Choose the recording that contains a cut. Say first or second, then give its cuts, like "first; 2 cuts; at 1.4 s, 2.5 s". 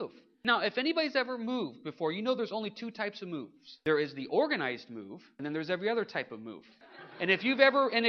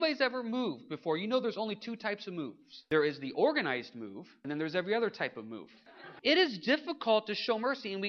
second; 1 cut; at 6.2 s